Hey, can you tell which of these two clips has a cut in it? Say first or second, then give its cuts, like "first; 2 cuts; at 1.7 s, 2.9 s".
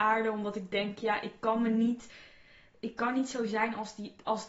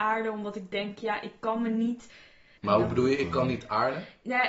second; 1 cut; at 2.6 s